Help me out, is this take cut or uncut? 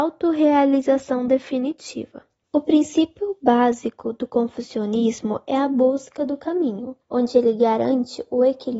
cut